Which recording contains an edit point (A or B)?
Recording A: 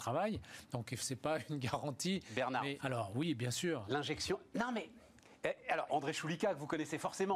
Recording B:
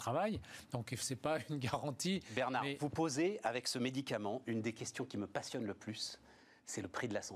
A